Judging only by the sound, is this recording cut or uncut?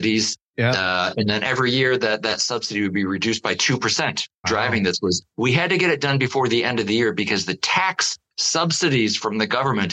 cut